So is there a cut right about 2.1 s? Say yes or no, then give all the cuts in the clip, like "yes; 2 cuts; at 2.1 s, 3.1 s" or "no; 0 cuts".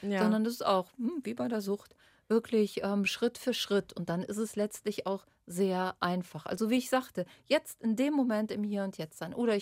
no; 0 cuts